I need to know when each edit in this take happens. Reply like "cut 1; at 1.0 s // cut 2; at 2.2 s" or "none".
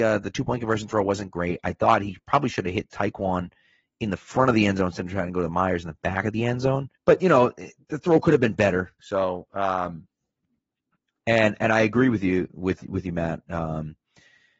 cut 1; at 7.0 s // cut 2; at 9.0 s